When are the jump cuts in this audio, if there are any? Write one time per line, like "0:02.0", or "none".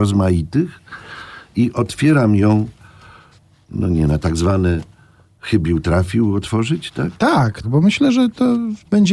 0:07.6

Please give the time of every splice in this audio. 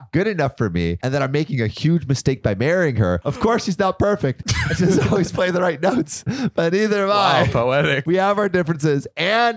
0:03.2

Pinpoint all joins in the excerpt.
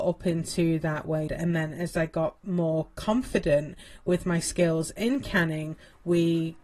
0:01.3

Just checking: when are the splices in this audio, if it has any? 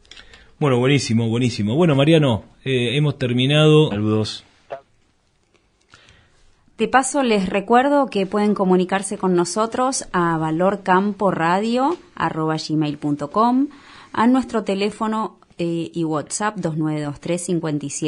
0:03.9

